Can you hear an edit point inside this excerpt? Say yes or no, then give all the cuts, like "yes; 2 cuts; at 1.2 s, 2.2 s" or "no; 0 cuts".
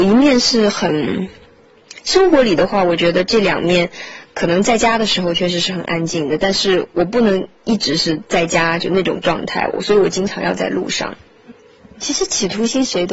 yes; 1 cut; at 2.0 s